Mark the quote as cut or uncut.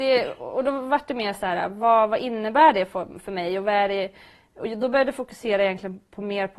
uncut